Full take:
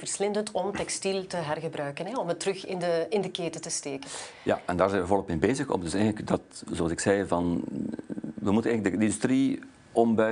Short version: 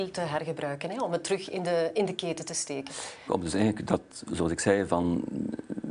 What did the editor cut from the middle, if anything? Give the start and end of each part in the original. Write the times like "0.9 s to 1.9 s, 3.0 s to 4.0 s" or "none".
4.4 s to 5.7 s